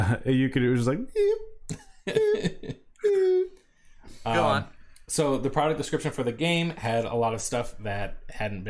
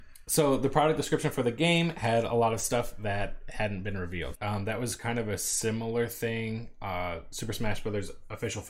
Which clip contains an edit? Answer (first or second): second